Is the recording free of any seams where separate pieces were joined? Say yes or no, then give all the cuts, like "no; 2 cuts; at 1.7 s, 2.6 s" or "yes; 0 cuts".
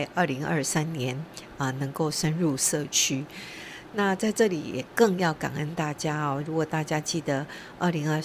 yes; 0 cuts